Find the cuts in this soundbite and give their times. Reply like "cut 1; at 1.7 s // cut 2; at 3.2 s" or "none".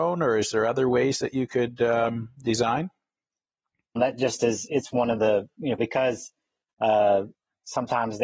cut 1; at 4.0 s // cut 2; at 5.8 s